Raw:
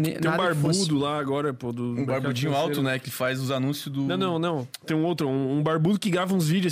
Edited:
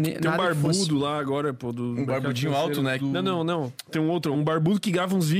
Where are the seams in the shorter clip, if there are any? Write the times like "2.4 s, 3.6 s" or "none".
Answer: 3.0 s, 4.3 s